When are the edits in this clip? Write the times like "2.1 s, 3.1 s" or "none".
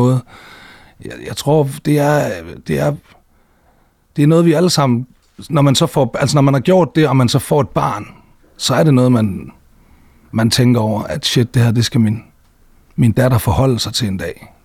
none